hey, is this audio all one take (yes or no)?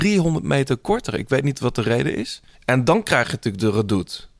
no